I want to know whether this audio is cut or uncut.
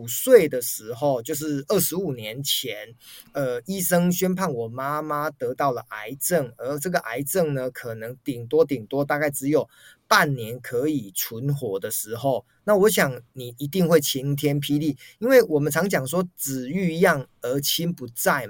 uncut